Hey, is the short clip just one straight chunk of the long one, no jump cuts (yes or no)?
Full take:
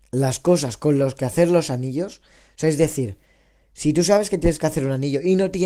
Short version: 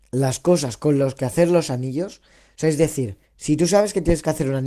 no